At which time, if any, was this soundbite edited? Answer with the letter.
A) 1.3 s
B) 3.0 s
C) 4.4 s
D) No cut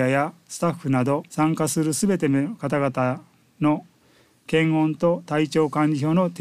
A